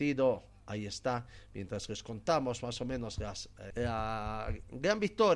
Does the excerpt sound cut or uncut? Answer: cut